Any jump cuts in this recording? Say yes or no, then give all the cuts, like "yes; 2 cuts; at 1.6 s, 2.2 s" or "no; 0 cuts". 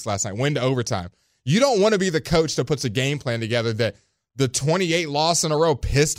no; 0 cuts